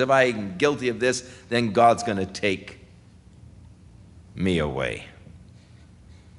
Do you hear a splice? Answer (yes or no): no